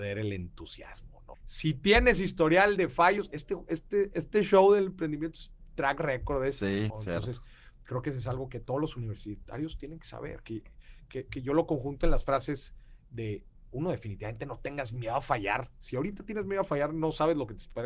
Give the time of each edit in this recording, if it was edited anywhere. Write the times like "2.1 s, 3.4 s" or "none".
1.3 s, 6.9 s